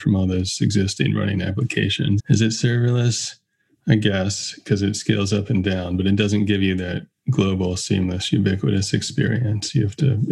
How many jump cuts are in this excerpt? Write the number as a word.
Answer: one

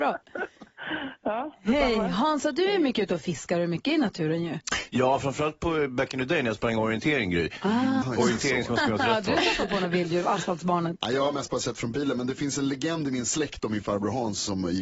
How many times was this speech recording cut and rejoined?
one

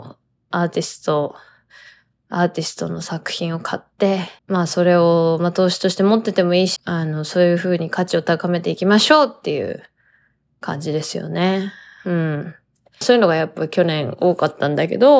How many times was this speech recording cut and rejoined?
three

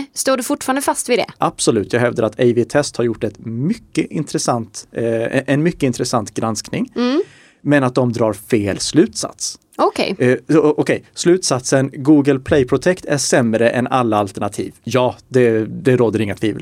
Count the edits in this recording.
zero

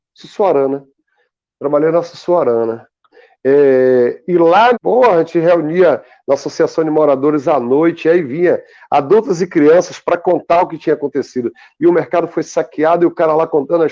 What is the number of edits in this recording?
two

